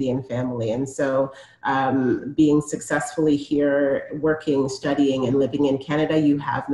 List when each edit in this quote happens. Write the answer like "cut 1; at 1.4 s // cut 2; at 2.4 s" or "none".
none